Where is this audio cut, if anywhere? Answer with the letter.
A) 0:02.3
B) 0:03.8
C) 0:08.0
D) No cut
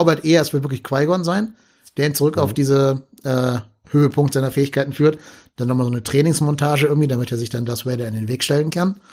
D